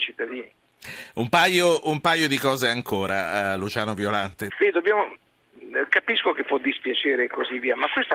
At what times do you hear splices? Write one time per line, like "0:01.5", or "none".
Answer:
0:04.5